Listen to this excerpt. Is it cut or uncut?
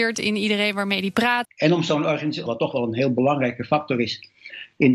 cut